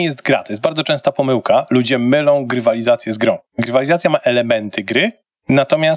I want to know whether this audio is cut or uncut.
uncut